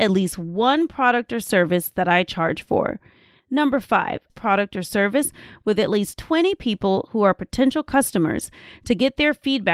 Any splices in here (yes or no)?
yes